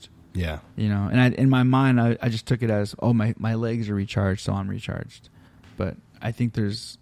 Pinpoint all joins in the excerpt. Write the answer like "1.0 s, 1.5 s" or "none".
none